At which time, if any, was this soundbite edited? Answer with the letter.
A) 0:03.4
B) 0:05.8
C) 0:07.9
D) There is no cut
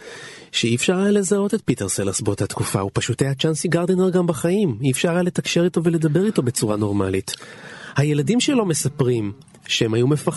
D